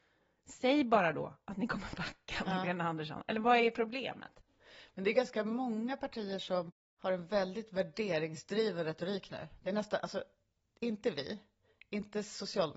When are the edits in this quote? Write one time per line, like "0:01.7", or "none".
none